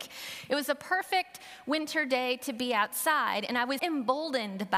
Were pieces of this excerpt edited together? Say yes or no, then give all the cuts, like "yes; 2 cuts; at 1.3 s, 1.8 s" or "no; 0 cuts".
yes; 1 cut; at 3.8 s